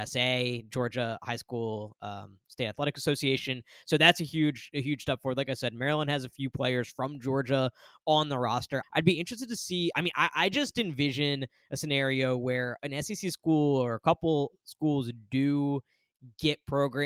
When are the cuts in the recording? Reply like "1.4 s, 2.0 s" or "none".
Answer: 8.8 s, 9.9 s